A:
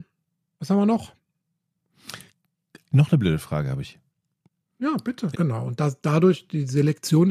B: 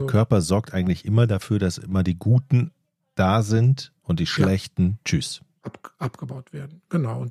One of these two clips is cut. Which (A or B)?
A